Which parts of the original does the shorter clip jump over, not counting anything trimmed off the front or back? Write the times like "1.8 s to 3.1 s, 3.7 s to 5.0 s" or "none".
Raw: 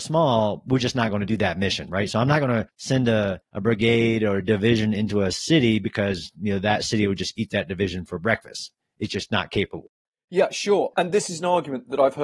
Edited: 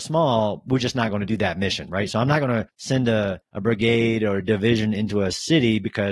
none